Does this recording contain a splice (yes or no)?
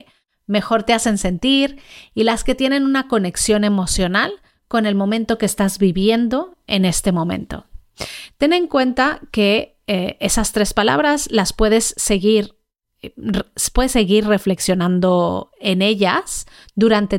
no